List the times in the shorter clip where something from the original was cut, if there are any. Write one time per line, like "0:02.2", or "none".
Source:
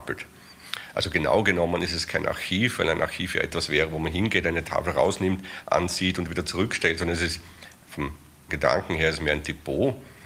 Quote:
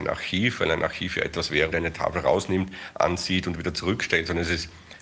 0:01.7